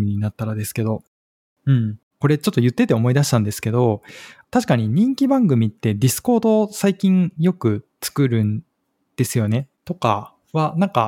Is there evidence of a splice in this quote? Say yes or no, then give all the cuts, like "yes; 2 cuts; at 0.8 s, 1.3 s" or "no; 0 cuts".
yes; 3 cuts; at 2.1 s, 4.4 s, 9.7 s